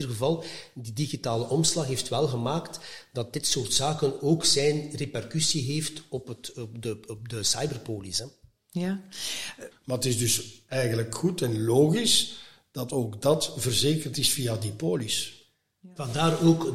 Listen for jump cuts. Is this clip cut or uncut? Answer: cut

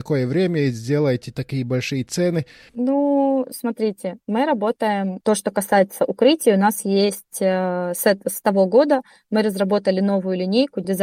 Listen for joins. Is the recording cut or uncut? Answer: cut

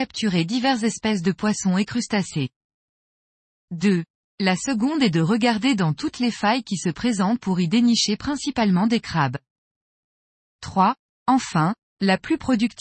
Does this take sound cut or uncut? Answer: uncut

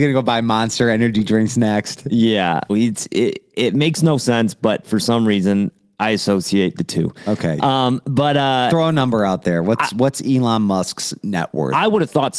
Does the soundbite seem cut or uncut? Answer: cut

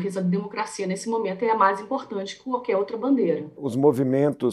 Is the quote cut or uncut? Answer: cut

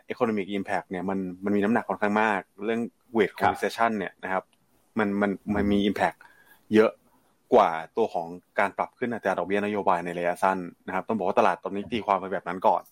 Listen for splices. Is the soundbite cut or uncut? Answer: uncut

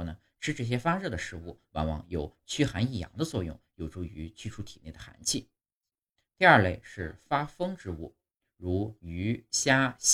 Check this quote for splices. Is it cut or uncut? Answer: uncut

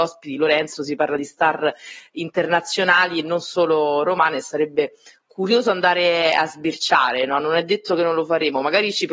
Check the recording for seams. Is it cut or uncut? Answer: uncut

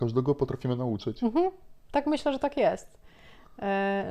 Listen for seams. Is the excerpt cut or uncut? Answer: uncut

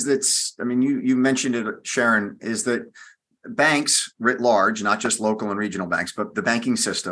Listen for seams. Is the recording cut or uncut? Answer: uncut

